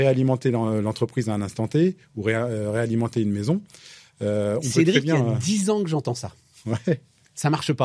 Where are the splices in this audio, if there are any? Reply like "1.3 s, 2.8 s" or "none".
none